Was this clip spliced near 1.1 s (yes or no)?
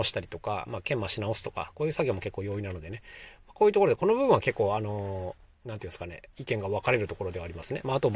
no